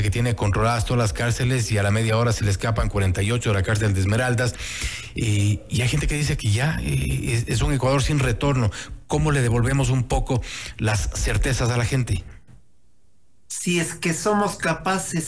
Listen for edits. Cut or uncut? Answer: uncut